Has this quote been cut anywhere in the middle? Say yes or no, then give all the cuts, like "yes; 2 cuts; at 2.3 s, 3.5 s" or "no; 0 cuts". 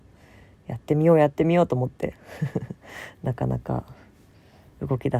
no; 0 cuts